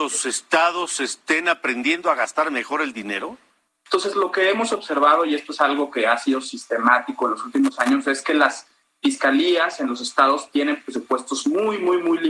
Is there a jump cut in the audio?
yes; 1 cut; at 3.9 s

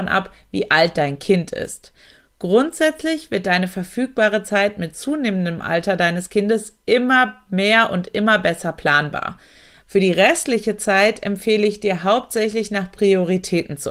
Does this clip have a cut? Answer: yes; 1 cut; at 9.8 s

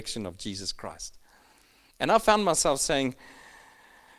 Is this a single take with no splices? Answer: yes; 0 cuts

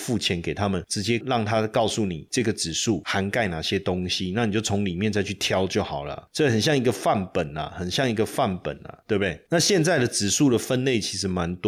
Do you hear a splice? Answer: no; 0 cuts

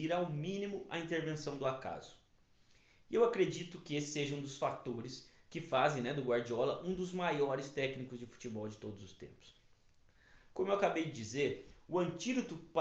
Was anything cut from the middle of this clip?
no; 0 cuts

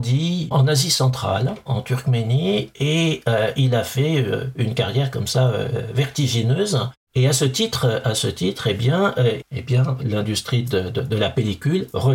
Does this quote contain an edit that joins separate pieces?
yes; 1 cut; at 9.4 s

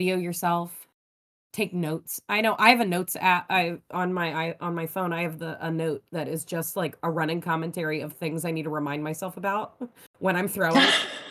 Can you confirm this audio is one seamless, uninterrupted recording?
yes; 0 cuts

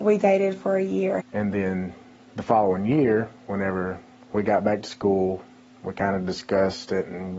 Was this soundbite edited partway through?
yes; 1 cut; at 1.2 s

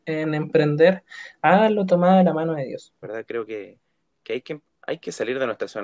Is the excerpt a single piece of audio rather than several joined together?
no; 1 cut; at 3.0 s

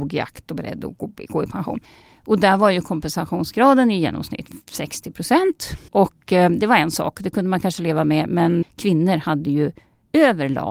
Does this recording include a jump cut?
yes; 2 cuts; at 5.9 s, 8.6 s

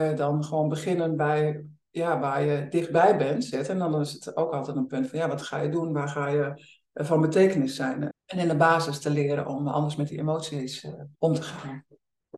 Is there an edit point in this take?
yes; 3 cuts; at 3.5 s, 8.1 s, 11.1 s

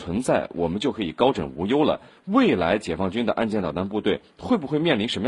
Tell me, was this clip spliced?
no; 0 cuts

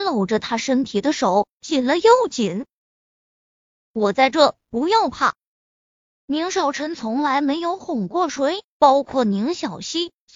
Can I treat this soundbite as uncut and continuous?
yes; 0 cuts

